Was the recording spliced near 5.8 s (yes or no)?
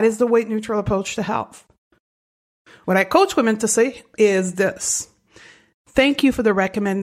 no